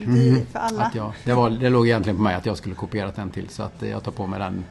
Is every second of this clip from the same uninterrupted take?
yes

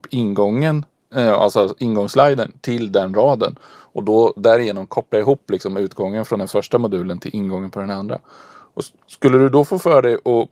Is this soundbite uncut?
yes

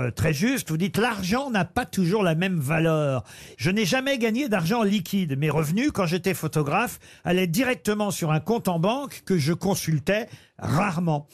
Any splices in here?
yes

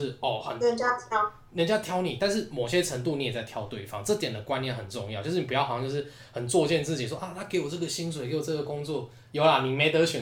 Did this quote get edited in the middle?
no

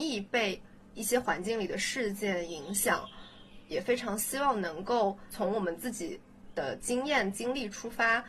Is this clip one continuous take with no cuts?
no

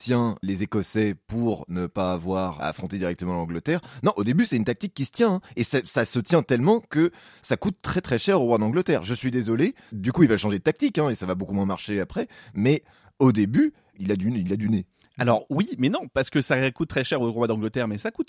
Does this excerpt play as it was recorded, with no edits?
no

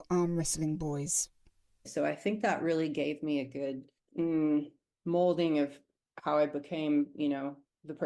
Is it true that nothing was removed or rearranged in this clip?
yes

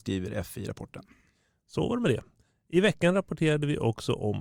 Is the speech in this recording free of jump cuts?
yes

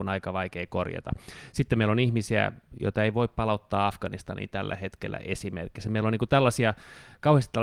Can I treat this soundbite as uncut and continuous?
yes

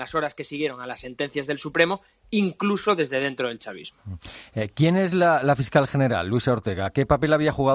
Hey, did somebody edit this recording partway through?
no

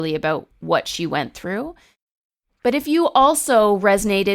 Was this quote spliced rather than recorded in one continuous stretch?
no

